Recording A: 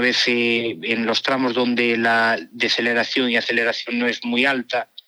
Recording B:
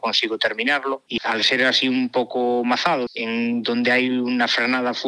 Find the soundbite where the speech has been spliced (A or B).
B